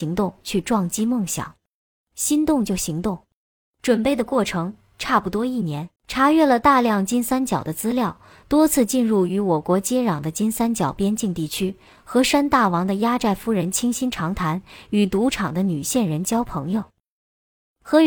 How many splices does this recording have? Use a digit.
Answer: 1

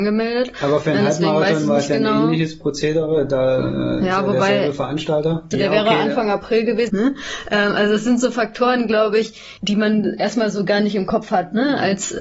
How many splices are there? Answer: 3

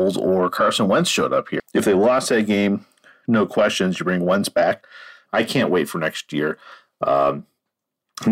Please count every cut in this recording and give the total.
2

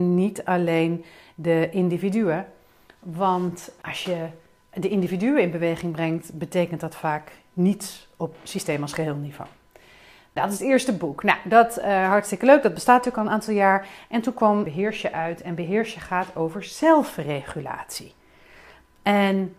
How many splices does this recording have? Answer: 0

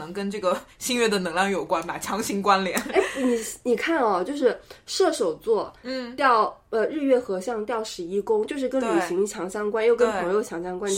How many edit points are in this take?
0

